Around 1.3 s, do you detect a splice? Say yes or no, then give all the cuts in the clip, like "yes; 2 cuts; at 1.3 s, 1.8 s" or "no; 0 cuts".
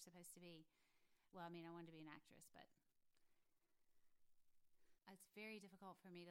yes; 2 cuts; at 1.3 s, 4.9 s